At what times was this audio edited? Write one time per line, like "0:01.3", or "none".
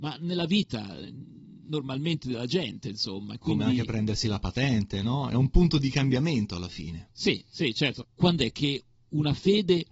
0:08.0